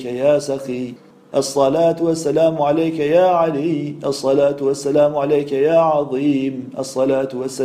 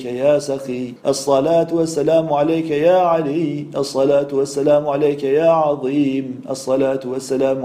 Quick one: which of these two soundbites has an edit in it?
second; 1 cut; at 1.0 s

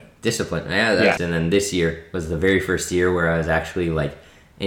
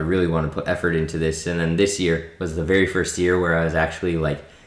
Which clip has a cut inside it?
first; 1 cut; at 1.2 s

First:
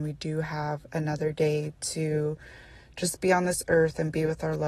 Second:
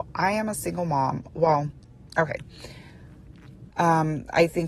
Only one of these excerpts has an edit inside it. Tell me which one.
second; 1 cut; at 3.7 s

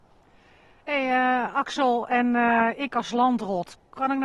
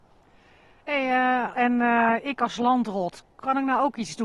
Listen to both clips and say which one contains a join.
second; 1 cut; at 1.5 s

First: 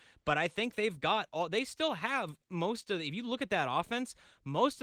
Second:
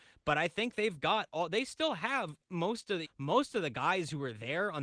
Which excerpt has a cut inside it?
second; 1 cut; at 3.0 s

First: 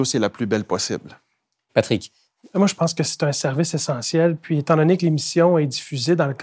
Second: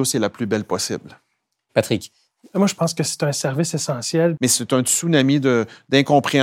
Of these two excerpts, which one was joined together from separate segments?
second; 1 cut; at 4.4 s

